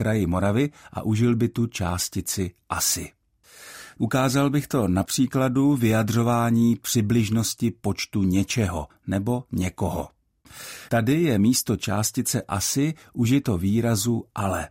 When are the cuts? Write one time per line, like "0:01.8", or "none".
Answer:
0:04.0
0:10.9